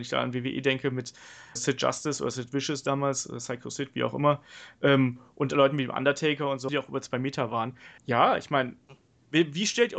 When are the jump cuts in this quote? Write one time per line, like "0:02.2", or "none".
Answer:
0:01.6
0:06.7
0:08.0